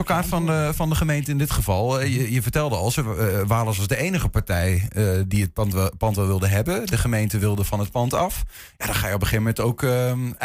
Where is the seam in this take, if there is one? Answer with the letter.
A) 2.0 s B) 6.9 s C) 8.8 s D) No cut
D